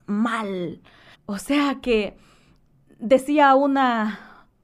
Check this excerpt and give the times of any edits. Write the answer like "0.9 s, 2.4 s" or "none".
1.1 s